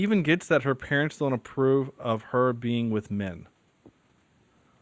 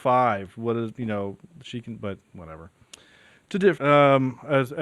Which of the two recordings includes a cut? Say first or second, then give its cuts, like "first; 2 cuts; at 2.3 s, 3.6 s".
second; 1 cut; at 3.8 s